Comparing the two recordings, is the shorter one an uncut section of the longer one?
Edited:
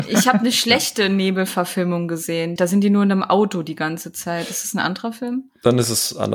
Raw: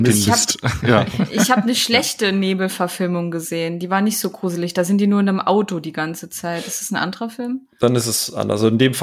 no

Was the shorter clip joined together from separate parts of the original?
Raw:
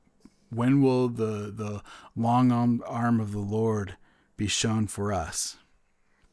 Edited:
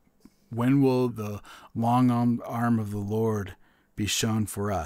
yes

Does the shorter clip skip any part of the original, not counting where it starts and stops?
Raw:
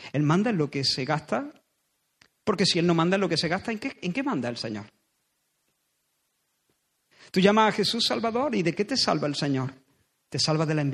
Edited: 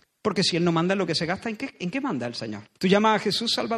yes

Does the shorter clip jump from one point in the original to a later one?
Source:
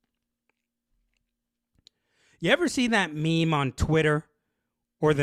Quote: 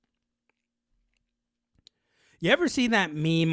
no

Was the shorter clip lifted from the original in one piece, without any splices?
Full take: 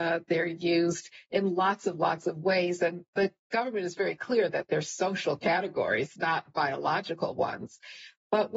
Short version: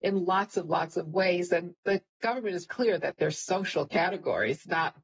no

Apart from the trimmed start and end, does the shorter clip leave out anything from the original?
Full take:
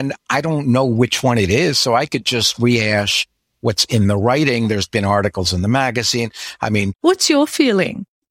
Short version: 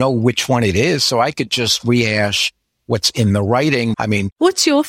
yes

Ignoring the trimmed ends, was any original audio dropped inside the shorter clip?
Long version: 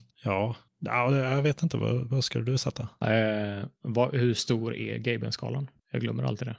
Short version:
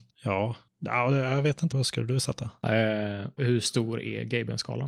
yes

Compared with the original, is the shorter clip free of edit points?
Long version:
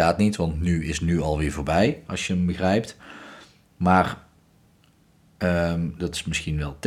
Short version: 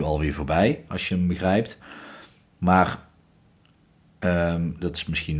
yes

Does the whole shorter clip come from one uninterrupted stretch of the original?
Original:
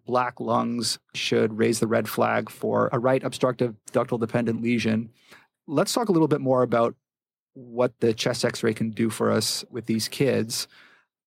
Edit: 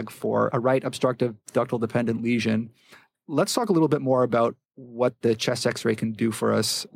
no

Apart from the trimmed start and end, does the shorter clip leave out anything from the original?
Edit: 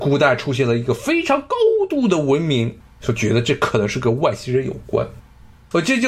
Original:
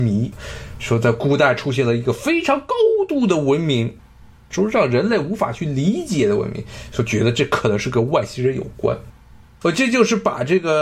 yes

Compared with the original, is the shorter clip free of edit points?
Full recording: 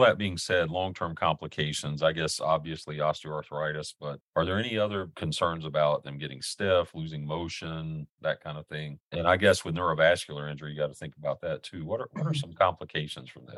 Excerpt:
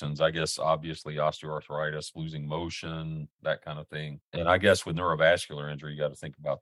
no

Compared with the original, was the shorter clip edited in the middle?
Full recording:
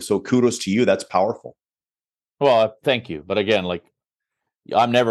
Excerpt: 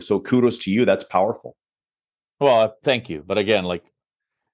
no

